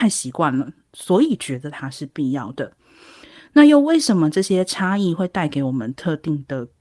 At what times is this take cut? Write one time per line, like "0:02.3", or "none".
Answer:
none